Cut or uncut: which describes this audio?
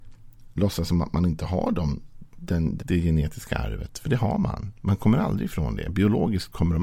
cut